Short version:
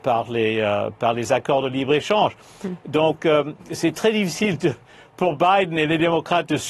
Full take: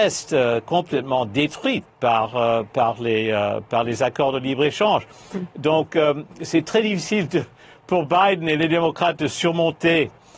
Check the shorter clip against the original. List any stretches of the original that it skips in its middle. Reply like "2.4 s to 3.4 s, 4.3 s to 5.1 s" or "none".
none